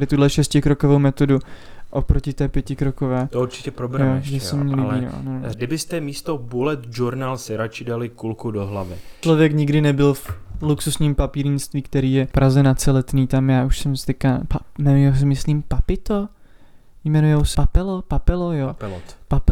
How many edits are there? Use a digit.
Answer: 3